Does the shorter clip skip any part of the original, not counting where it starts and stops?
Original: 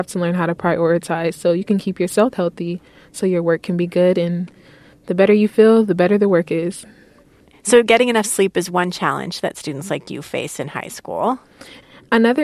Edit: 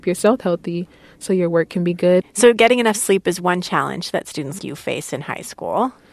yes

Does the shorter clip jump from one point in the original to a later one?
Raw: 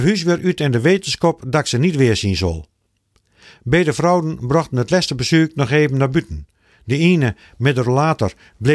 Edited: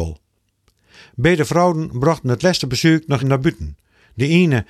yes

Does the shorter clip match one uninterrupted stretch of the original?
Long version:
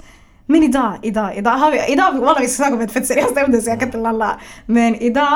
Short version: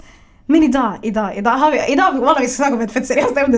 yes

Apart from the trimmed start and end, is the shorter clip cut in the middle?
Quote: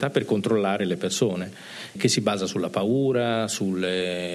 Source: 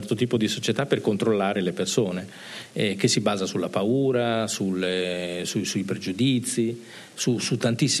yes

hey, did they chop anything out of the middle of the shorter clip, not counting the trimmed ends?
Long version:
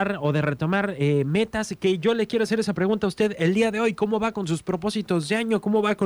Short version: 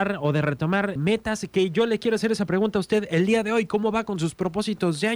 yes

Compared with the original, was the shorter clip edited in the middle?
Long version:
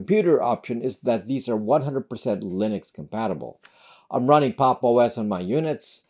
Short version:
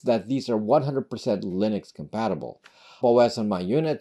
yes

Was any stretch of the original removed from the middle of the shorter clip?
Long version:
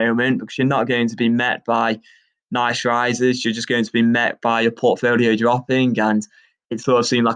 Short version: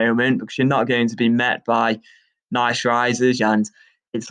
yes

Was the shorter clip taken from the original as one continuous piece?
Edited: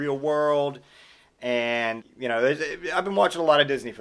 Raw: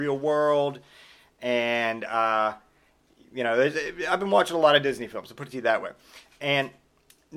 no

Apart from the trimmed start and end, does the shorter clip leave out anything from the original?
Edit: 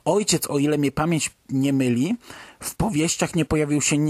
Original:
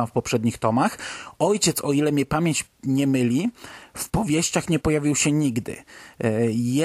no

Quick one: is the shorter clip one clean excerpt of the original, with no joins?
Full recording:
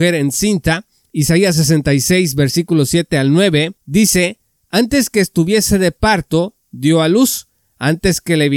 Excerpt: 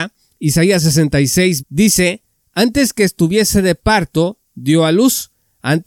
no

